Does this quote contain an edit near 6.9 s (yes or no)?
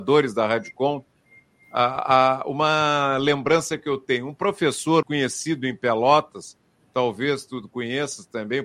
no